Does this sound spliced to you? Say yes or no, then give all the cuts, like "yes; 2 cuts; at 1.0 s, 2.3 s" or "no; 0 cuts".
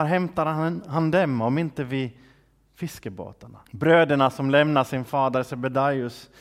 yes; 1 cut; at 3.7 s